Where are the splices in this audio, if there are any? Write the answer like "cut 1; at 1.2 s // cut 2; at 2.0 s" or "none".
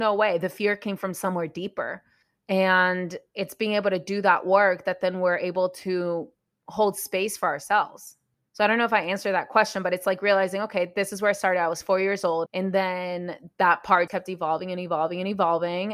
cut 1; at 12.5 s // cut 2; at 14.1 s